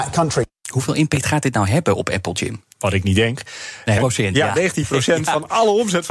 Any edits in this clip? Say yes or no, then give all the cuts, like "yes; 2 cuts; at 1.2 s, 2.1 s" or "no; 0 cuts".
yes; 2 cuts; at 2.6 s, 4.0 s